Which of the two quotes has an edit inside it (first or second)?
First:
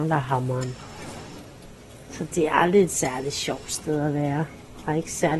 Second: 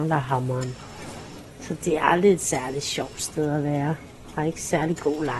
second